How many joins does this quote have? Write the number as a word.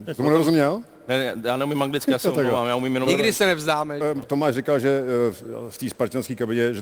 one